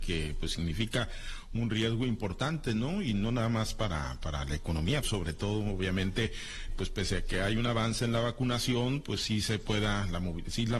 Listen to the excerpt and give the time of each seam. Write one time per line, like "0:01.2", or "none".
0:05.0
0:06.7